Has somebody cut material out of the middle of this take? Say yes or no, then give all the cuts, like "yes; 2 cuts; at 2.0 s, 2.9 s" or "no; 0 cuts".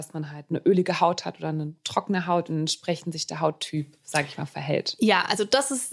no; 0 cuts